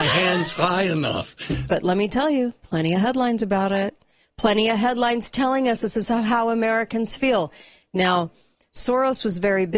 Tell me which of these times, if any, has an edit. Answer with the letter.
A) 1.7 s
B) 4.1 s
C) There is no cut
A